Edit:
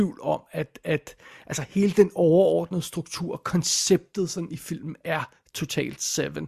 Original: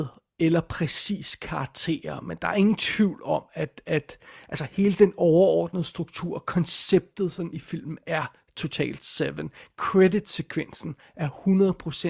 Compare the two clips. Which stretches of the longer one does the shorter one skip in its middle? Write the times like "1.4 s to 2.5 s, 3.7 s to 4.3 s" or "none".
none